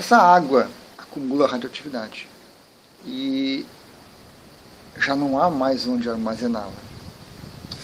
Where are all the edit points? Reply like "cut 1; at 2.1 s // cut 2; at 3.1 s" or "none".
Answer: cut 1; at 0.9 s // cut 2; at 3.0 s